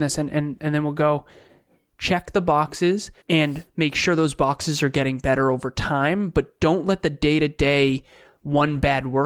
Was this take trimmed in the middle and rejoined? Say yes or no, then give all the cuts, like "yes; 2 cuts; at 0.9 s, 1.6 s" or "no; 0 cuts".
yes; 2 cuts; at 1.9 s, 3.2 s